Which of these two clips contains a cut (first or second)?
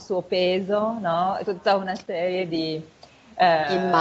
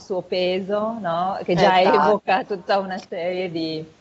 first